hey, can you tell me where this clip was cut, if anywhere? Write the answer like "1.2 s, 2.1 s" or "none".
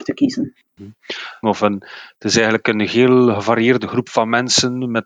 1.4 s